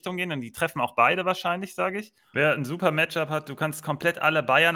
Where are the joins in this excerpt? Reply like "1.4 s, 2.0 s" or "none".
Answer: 2.3 s